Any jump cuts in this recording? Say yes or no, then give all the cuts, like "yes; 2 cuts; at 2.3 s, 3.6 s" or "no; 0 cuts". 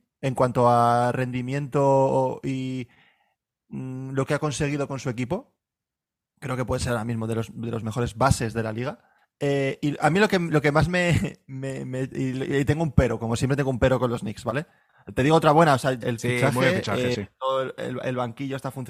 yes; 1 cut; at 16.0 s